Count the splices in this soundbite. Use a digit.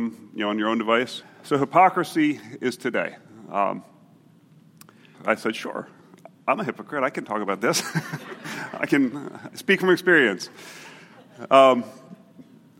2